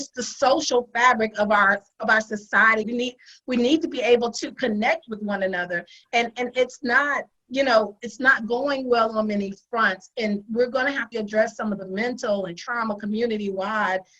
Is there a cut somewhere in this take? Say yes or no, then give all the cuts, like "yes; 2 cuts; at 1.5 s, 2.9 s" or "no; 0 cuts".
yes; 2 cuts; at 2.8 s, 11.1 s